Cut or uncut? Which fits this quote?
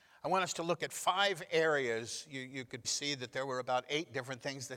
cut